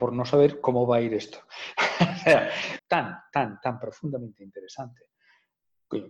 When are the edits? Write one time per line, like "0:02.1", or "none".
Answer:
0:02.8

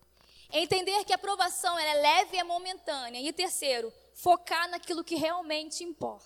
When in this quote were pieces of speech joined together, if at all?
none

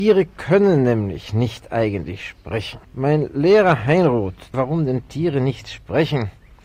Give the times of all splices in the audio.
0:02.8
0:04.5

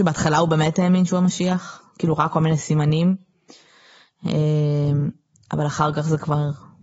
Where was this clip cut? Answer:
none

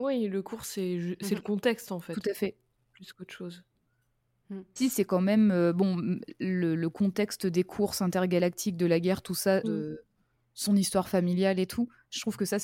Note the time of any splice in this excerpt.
0:04.8
0:09.6

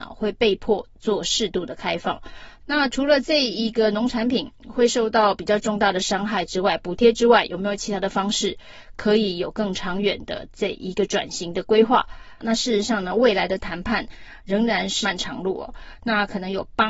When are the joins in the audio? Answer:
0:02.6
0:12.4
0:15.0

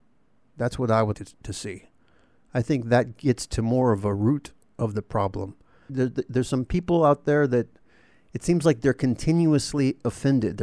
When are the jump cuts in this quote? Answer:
0:01.1
0:05.9

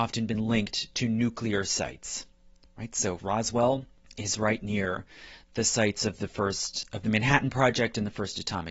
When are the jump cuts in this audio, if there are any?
0:03.2

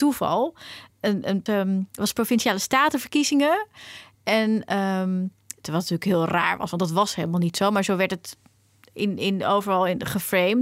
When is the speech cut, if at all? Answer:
0:01.5
0:05.6

